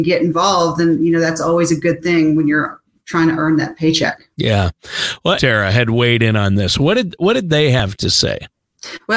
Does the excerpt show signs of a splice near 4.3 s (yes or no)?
yes